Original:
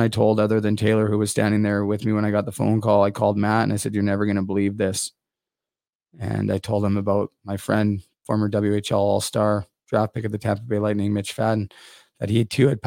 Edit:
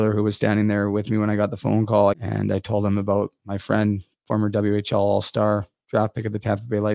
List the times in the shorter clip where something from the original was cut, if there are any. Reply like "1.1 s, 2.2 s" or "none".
2.1 s